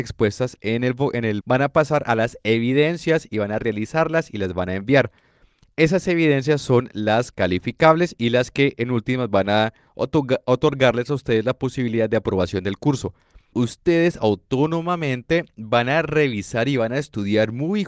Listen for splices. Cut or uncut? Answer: cut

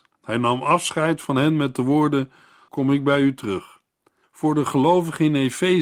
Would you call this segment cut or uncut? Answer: cut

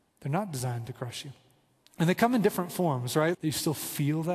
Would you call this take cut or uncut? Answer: cut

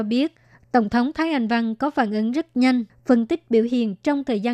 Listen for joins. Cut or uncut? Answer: cut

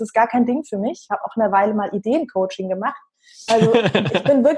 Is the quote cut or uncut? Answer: cut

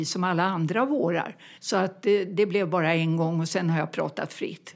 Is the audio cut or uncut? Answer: cut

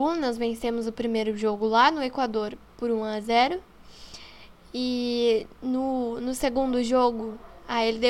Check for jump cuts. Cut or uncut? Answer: uncut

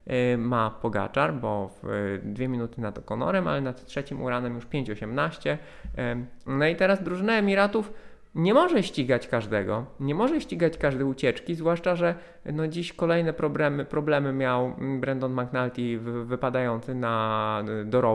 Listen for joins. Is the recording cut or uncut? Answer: cut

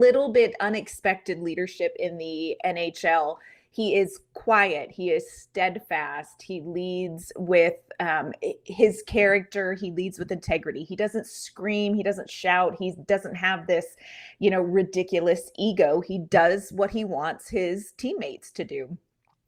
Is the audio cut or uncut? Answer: uncut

